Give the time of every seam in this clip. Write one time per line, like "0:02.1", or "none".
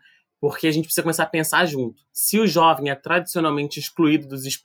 0:02.1